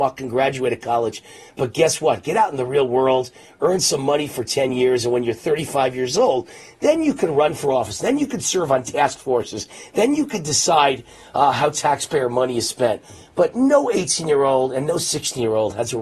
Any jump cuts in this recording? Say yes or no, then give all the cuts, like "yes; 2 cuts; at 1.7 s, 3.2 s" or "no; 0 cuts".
no; 0 cuts